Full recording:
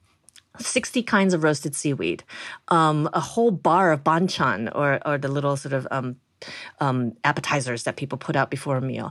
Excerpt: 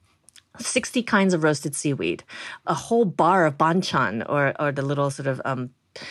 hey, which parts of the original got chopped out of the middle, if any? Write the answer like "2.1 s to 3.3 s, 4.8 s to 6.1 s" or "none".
2.6 s to 3.1 s